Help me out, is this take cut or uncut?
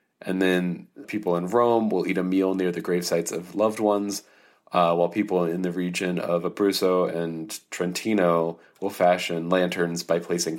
cut